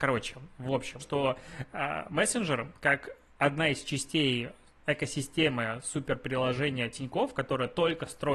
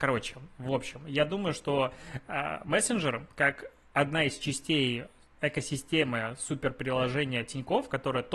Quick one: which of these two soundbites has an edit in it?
first; 1 cut; at 1.0 s

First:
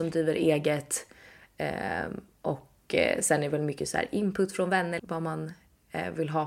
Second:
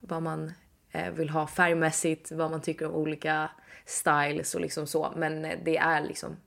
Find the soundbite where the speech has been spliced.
first; 1 cut; at 5.0 s

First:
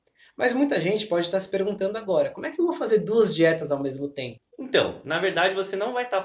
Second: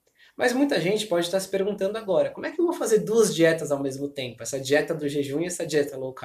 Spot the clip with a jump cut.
first; 1 cut; at 4.4 s

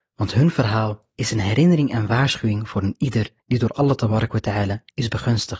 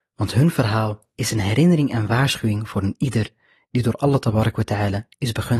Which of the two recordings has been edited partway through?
first; 1 cut; at 3.4 s

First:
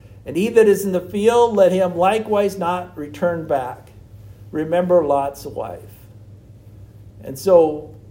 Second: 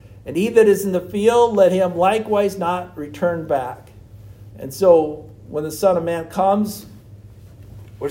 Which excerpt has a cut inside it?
second; 1 cut; at 4.5 s

